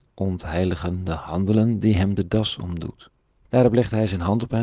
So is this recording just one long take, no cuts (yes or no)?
no